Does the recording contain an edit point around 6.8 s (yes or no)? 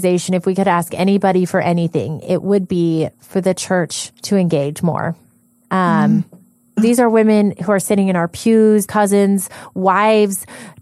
yes